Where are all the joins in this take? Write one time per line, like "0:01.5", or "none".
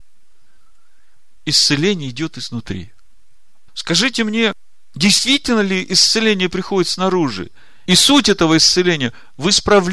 0:03.7
0:07.9